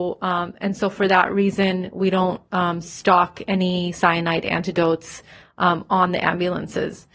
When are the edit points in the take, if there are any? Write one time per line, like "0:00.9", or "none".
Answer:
none